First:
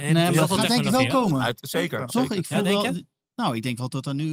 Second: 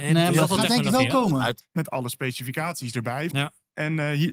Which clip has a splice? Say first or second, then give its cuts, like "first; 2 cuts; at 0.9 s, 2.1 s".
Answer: second; 2 cuts; at 1.6 s, 3.3 s